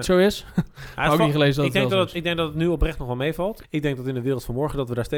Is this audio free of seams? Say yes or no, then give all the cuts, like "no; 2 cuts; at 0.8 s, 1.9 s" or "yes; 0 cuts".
no; 1 cut; at 3.6 s